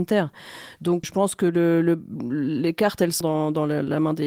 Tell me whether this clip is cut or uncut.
cut